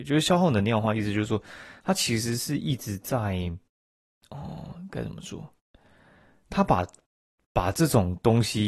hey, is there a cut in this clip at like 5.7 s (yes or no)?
no